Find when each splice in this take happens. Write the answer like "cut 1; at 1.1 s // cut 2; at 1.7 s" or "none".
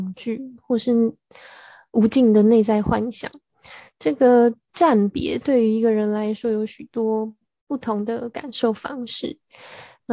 none